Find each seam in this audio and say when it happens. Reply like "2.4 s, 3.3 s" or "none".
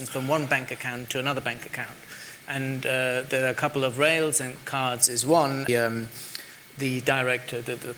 2.4 s, 5.7 s